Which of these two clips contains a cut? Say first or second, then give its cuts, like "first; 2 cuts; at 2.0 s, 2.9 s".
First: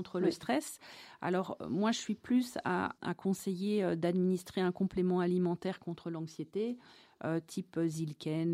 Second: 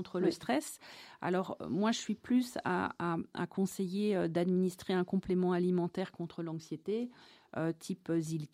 first; 1 cut; at 3.0 s